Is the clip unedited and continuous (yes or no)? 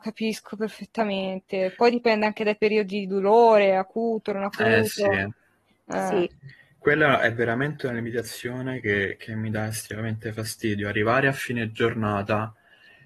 yes